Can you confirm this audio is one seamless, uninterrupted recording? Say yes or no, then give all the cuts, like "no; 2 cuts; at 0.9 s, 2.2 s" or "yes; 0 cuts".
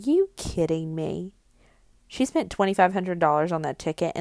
yes; 0 cuts